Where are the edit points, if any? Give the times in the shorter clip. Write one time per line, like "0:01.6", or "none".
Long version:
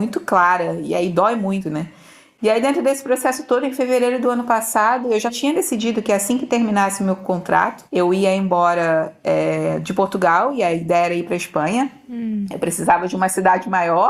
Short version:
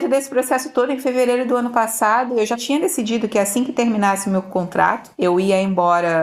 none